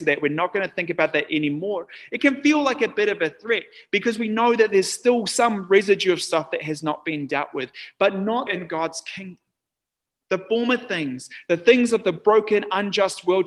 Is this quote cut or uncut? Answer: cut